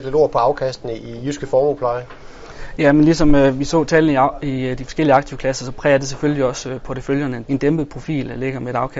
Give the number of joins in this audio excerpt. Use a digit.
1